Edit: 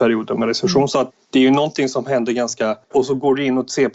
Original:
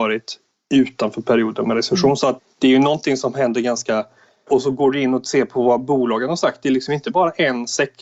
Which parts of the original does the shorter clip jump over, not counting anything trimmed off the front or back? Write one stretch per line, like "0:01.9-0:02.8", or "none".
0:04.1-0:04.4